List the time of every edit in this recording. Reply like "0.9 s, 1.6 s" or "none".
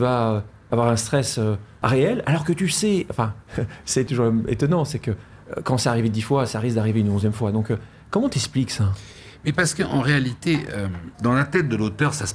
11.1 s